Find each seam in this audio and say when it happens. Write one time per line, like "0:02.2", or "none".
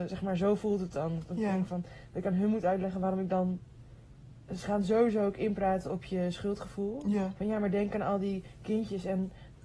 none